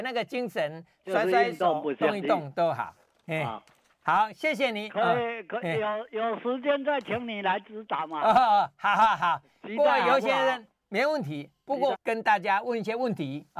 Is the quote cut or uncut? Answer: cut